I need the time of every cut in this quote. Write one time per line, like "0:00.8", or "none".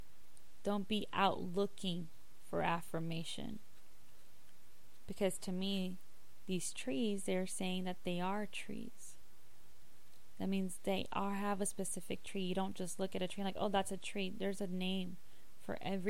none